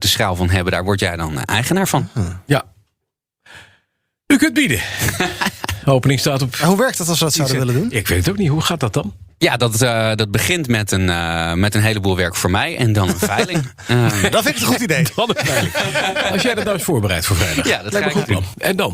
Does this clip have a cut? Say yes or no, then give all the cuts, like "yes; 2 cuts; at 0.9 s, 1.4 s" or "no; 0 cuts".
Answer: no; 0 cuts